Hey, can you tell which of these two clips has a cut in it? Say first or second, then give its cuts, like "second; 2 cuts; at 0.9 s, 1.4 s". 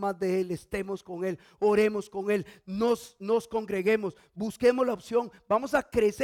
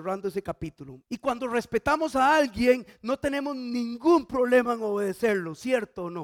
second; 1 cut; at 1.0 s